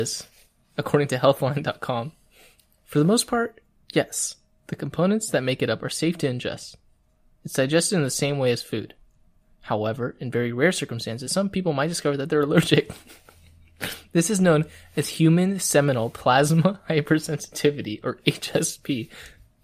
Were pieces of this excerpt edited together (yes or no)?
no